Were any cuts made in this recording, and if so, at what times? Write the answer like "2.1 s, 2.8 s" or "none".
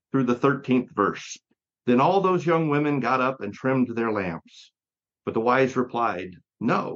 1.7 s, 5.1 s

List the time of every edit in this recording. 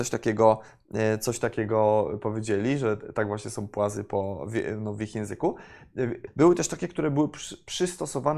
6.3 s

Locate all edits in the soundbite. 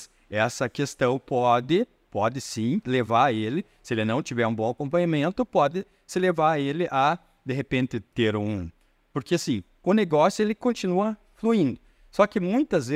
none

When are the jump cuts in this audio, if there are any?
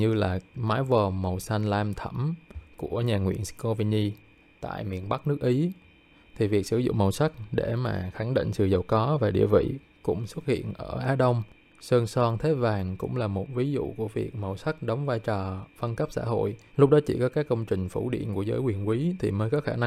16.7 s

